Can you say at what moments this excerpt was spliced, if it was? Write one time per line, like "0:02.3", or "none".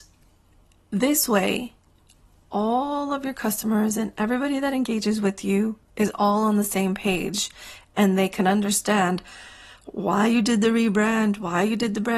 none